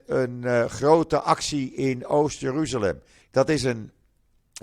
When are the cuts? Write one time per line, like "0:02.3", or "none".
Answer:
0:03.2